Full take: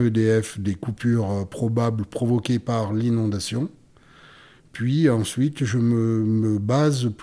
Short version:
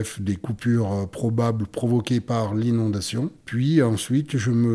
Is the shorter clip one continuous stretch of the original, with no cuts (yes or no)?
no